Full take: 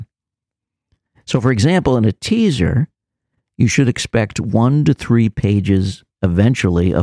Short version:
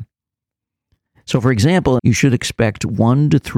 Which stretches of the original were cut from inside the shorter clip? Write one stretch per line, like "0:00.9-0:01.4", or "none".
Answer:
0:02.0-0:03.5

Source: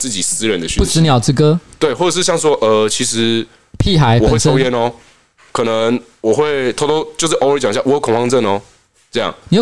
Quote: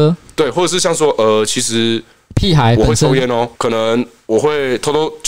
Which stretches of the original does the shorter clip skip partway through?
0:05.0-0:05.5

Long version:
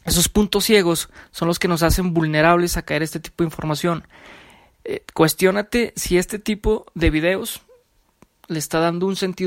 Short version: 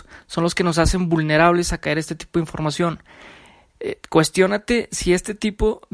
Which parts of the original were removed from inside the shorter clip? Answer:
none

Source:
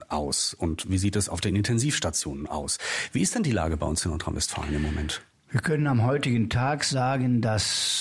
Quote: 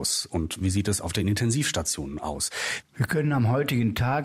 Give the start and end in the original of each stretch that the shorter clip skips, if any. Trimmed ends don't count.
0:03.1-0:05.4

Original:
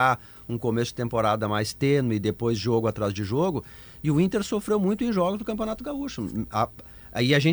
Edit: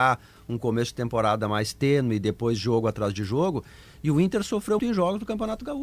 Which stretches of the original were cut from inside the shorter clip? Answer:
0:04.8-0:05.0

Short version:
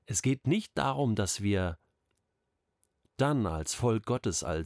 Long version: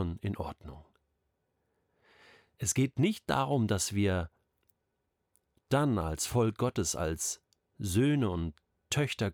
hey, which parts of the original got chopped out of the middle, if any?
none

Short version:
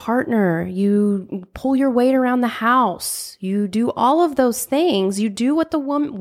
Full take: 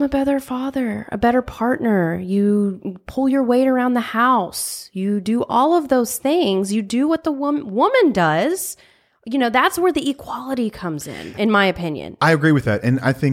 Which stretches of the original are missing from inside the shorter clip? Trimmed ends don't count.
none

